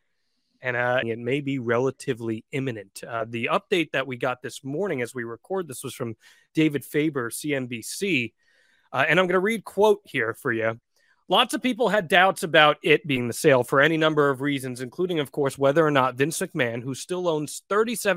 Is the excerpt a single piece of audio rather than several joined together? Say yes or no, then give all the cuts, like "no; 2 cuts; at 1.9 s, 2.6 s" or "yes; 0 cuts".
no; 1 cut; at 1.0 s